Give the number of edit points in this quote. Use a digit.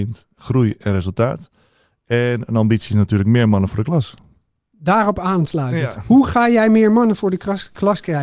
0